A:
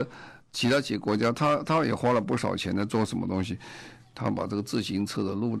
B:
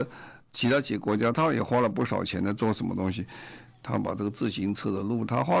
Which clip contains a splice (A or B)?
B